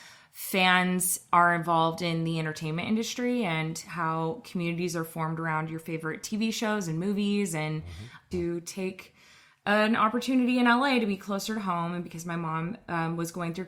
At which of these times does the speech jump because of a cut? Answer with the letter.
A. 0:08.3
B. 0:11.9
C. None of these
A